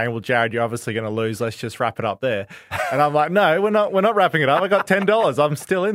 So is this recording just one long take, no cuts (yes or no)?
yes